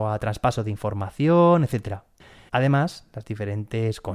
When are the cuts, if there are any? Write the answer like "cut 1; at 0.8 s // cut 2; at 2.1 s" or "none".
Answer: cut 1; at 2.5 s